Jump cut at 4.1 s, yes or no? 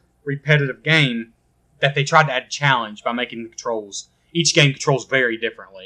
no